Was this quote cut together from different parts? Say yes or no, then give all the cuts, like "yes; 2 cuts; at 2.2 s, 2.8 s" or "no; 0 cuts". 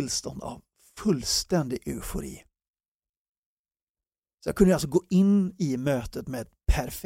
no; 0 cuts